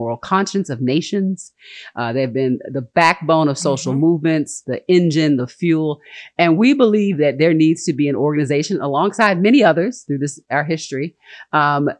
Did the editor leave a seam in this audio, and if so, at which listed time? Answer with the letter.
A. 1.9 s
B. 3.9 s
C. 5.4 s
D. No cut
C